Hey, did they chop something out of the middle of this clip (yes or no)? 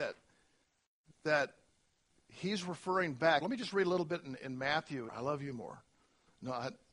yes